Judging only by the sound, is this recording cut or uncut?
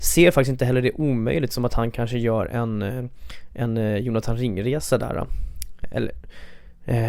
cut